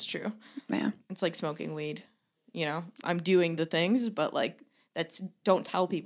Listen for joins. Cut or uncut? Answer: cut